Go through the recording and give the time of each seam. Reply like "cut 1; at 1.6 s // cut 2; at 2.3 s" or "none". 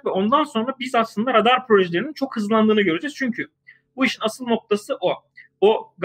none